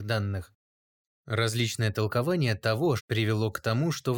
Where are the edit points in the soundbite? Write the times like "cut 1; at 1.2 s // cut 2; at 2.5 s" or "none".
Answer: cut 1; at 1.1 s // cut 2; at 3.0 s